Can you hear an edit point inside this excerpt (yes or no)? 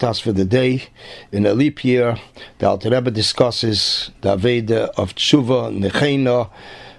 no